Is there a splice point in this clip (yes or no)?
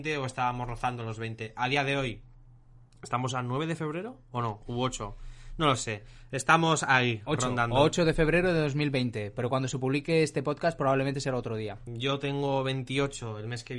yes